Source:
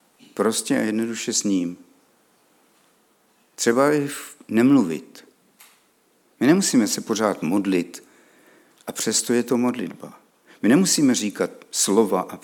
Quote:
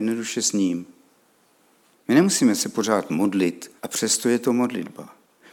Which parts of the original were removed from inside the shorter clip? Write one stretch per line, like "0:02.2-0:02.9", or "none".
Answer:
0:02.8-0:06.2
0:08.1-0:08.8